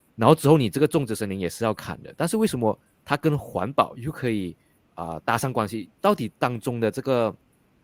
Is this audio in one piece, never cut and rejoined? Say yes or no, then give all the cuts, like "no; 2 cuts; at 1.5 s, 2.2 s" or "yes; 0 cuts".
yes; 0 cuts